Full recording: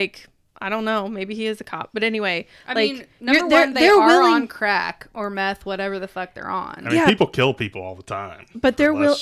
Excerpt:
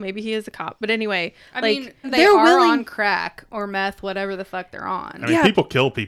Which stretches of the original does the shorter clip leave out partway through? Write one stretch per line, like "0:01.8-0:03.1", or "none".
0:03.2-0:03.7